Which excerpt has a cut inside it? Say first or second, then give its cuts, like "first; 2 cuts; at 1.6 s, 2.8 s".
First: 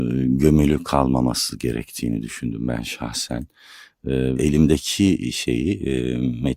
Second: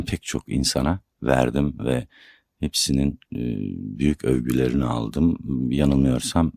first; 1 cut; at 4.4 s